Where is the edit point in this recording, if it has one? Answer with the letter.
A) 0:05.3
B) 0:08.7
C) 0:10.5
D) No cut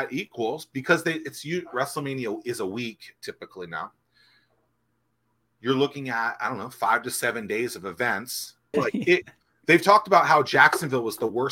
B